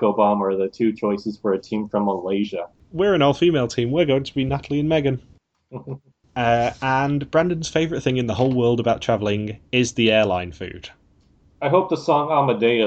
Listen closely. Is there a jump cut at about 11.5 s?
yes; 1 cut; at 11.5 s

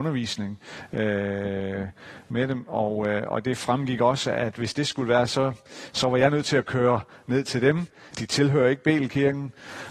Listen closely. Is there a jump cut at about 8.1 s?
yes; 1 cut; at 8.1 s

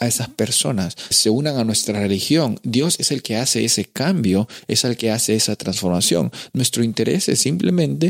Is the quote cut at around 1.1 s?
yes; 1 cut; at 1.1 s

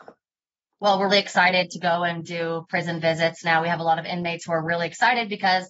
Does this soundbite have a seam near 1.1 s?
yes; 1 cut; at 1.1 s

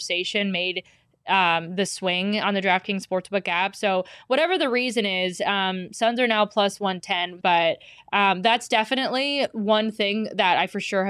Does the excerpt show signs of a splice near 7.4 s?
yes; 1 cut; at 7.4 s

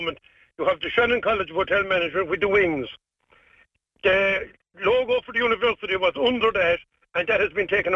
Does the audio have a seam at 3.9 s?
no; 0 cuts

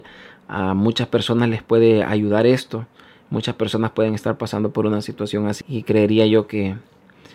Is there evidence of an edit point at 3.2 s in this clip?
no; 1 cut; at 5.6 s

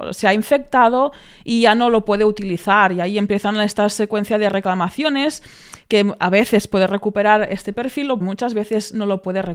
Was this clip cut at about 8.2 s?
yes; 1 cut; at 8.2 s

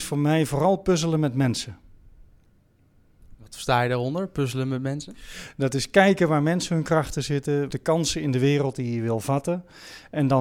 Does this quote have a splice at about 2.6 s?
no; 1 cut; at 7.7 s

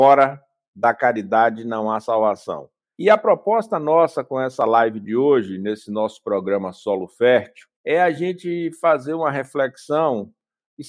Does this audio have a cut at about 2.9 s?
yes; 2 cuts; at 2.9 s, 7.7 s

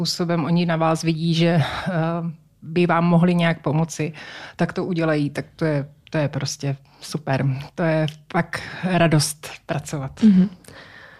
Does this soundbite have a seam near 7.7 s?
no; 0 cuts

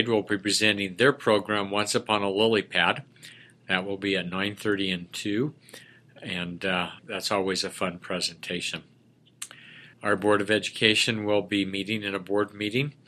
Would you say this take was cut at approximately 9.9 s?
yes; 2 cuts; at 7.0 s, 9.9 s

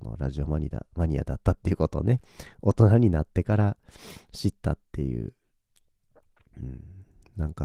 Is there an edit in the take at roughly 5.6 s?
no; 0 cuts

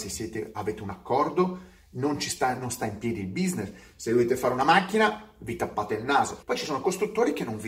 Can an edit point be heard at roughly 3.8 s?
no; 1 cut; at 6.4 s

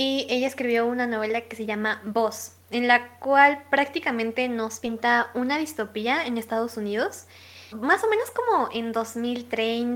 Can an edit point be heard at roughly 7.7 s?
yes; 1 cut; at 7.7 s

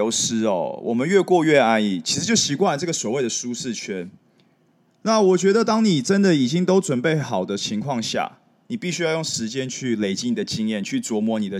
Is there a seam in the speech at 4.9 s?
yes; 1 cut; at 4.9 s

